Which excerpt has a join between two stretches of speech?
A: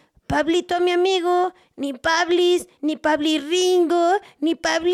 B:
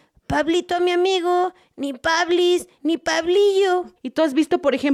B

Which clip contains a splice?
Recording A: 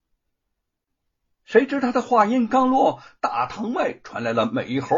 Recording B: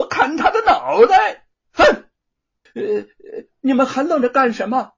B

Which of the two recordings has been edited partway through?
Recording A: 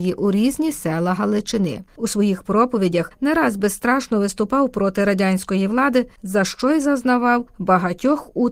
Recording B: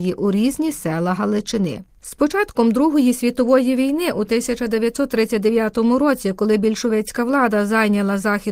A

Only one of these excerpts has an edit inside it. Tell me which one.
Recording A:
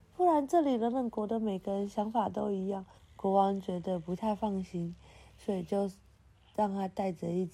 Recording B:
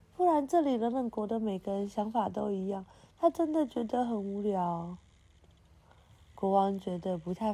A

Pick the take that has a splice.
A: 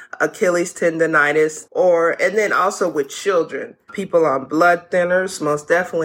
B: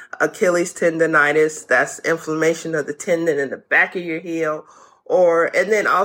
A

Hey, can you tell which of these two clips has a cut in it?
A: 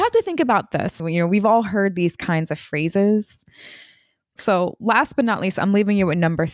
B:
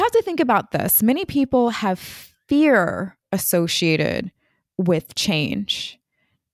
A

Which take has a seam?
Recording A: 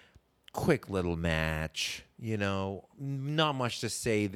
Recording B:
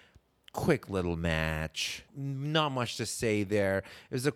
B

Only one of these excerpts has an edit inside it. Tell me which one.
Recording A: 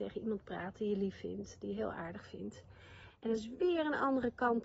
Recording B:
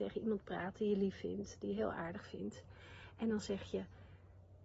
A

